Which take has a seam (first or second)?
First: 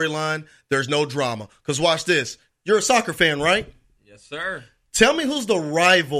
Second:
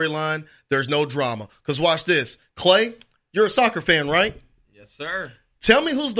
first